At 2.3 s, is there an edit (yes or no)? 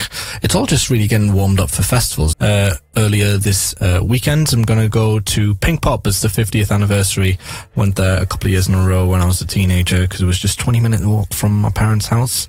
yes